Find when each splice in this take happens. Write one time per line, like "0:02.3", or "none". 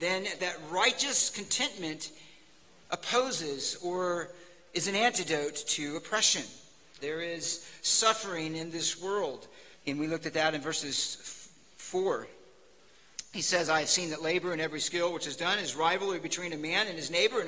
0:07.0
0:09.7